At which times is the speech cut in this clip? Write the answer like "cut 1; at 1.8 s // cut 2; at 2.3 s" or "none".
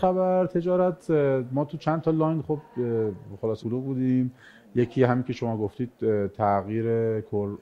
cut 1; at 3.6 s